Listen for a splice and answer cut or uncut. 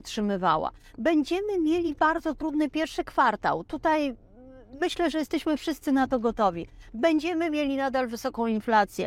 uncut